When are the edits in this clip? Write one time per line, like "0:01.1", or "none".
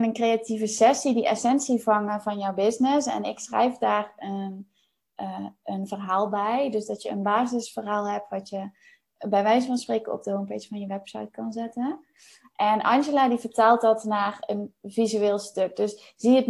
none